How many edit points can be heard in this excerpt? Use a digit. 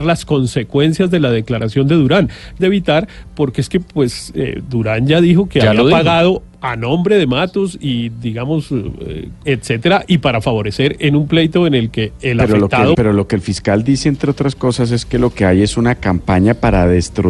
3